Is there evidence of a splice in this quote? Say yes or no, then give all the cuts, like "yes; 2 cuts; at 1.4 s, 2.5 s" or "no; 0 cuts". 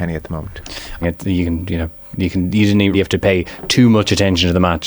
yes; 2 cuts; at 1.0 s, 2.9 s